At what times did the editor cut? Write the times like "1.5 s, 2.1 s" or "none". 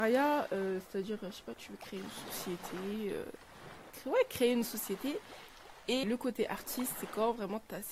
3.9 s, 6.0 s